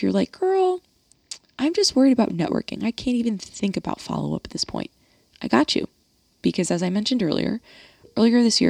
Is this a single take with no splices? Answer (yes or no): yes